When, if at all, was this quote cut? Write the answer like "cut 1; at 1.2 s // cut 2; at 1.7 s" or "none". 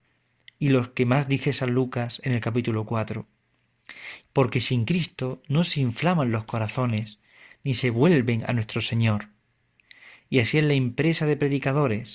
cut 1; at 4.2 s